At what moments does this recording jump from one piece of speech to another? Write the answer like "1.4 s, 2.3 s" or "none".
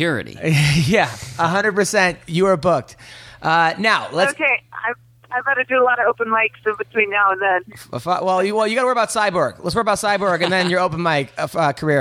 none